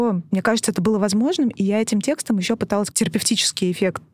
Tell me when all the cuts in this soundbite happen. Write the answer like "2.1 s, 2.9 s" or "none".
2.9 s